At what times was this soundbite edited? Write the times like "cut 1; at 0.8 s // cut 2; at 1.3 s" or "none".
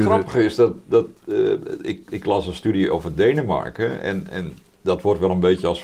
none